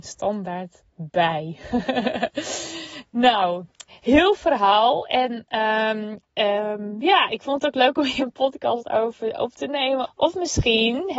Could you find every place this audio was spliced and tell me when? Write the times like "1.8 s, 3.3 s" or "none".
6.2 s, 8.2 s, 10.0 s